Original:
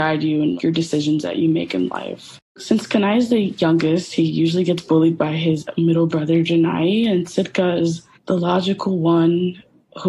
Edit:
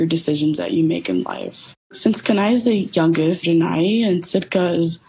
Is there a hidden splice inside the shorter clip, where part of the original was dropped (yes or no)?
yes